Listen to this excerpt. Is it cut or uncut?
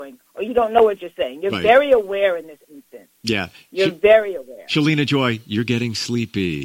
uncut